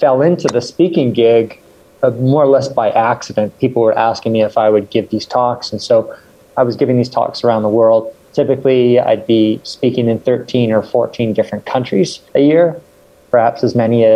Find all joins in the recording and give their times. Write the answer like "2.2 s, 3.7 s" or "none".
6.5 s, 12.3 s